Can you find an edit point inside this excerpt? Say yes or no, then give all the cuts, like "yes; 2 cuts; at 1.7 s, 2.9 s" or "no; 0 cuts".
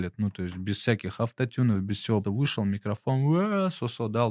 yes; 1 cut; at 2.2 s